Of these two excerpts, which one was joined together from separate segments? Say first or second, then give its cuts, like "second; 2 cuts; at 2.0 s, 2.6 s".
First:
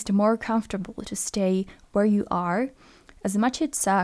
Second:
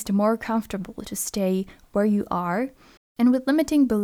second; 1 cut; at 3.0 s